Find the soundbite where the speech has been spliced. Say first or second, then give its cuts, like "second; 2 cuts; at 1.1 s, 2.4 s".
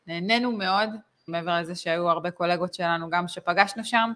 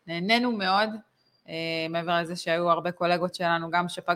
first; 1 cut; at 1.3 s